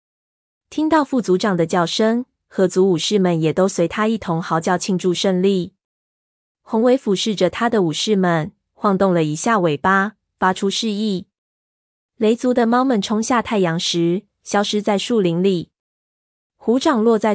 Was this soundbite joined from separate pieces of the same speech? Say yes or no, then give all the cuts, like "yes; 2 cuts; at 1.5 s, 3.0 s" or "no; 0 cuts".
no; 0 cuts